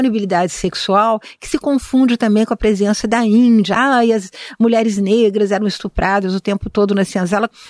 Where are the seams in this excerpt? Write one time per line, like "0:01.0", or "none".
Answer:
none